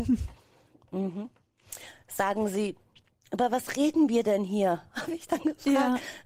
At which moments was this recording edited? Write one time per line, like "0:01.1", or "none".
none